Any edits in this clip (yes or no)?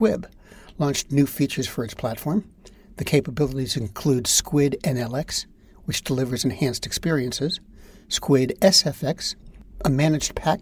no